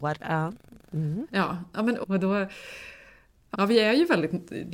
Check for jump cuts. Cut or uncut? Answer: cut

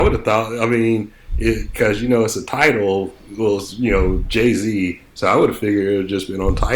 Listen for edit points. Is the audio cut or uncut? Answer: uncut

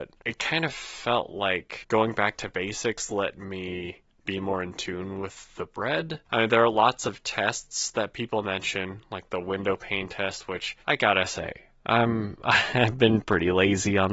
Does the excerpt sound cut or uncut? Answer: cut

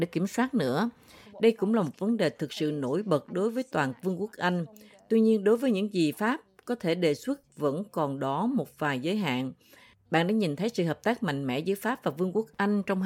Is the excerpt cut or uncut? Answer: cut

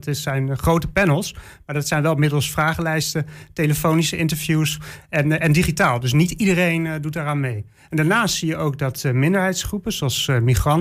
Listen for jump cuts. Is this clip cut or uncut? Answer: uncut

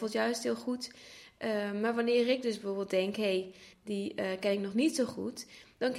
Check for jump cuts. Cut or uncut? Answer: cut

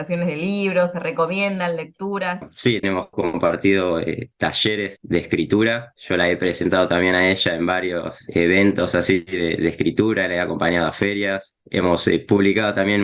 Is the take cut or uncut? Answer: cut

